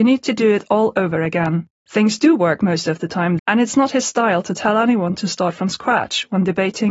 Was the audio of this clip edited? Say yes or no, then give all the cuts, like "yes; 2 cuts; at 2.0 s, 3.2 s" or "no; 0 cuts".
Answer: yes; 2 cuts; at 1.8 s, 3.4 s